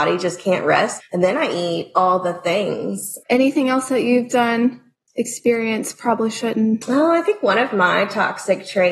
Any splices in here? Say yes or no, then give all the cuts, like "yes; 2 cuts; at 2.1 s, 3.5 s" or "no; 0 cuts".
yes; 2 cuts; at 1.0 s, 3.2 s